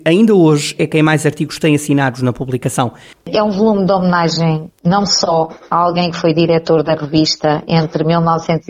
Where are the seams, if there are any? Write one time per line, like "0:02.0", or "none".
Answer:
0:03.1